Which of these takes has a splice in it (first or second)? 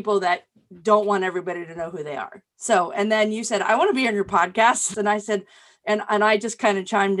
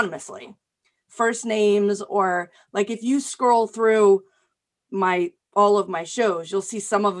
first